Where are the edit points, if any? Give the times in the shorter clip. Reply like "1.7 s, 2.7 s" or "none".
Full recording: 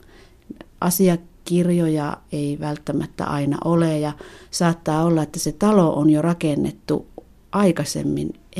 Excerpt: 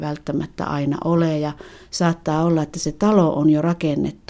none